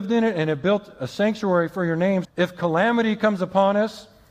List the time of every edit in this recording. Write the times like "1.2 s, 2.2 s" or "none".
2.2 s